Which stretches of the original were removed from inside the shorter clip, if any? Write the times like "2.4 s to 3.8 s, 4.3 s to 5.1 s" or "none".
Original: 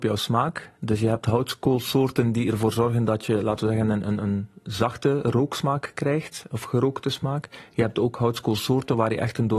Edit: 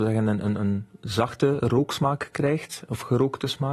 none